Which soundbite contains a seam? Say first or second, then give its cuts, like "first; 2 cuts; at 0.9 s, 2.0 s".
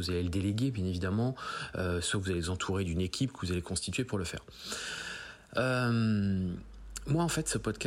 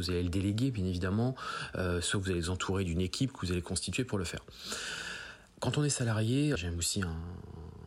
second; 2 cuts; at 5.5 s, 6.6 s